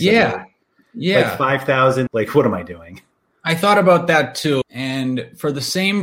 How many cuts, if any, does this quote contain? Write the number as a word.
two